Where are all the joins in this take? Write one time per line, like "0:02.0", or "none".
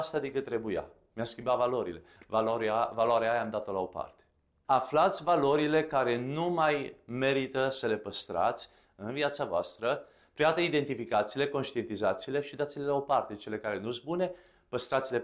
0:04.6